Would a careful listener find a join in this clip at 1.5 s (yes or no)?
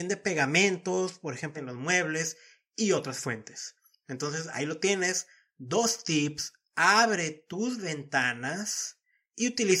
yes